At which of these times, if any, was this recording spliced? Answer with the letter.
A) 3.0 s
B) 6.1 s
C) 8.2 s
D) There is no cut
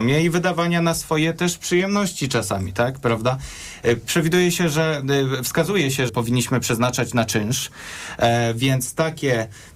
B